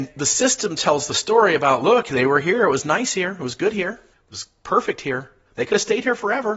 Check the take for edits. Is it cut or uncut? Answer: uncut